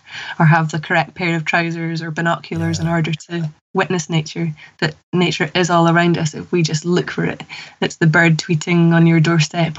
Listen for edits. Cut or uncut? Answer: uncut